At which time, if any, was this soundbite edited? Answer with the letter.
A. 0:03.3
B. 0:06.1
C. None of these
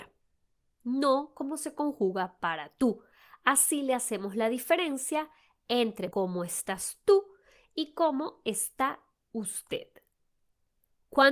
B